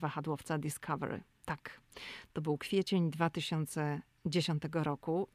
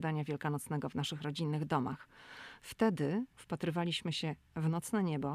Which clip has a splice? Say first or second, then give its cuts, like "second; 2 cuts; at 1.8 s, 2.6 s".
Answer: second; 1 cut; at 3.3 s